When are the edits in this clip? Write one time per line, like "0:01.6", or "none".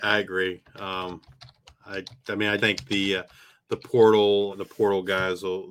0:02.6
0:04.5